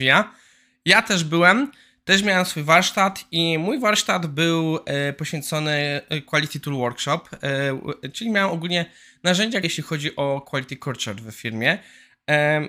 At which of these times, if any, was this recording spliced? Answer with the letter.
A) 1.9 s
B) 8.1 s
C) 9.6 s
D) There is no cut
C